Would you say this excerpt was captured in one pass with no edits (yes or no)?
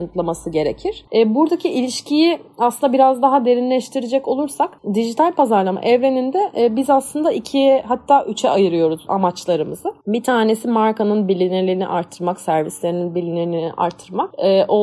no